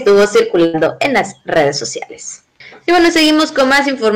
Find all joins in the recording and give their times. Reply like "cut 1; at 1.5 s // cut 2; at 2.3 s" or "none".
none